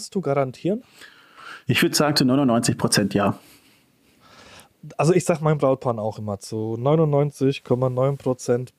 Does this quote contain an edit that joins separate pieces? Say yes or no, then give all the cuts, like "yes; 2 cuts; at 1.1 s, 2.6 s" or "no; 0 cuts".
no; 0 cuts